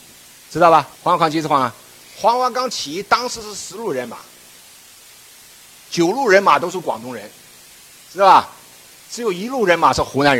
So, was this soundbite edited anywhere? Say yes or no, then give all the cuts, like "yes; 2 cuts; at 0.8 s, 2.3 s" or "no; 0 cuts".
yes; 1 cut; at 1.0 s